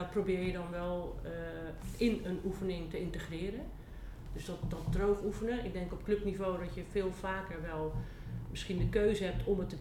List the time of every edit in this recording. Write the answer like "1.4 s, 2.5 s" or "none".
4.3 s